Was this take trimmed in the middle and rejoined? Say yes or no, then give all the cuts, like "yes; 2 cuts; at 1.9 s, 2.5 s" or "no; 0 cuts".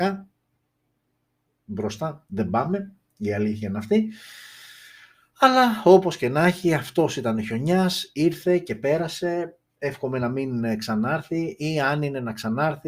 no; 0 cuts